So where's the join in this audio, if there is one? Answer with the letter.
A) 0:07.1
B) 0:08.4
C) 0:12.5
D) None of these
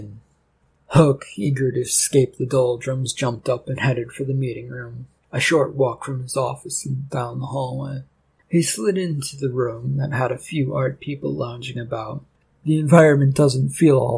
A